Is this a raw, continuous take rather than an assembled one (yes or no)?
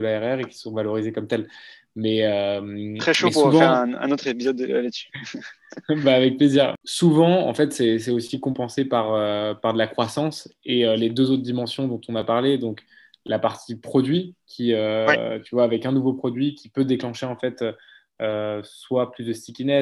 yes